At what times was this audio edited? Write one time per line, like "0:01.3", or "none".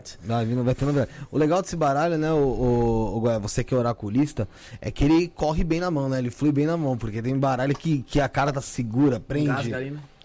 none